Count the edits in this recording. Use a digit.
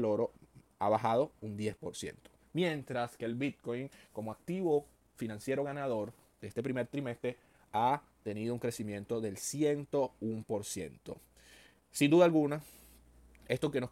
0